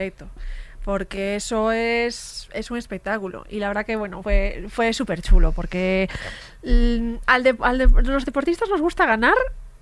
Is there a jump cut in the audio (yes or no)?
no